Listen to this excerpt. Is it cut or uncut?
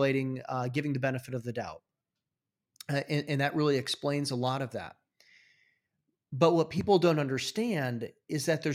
uncut